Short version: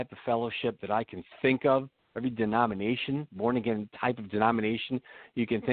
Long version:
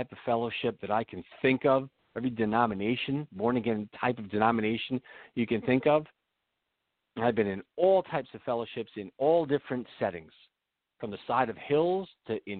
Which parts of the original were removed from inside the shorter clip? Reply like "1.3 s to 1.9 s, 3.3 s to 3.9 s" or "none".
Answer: none